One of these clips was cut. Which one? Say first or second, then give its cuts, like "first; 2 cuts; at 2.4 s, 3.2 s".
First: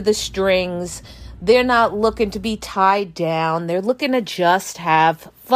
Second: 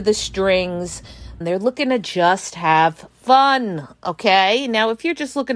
second; 1 cut; at 1.4 s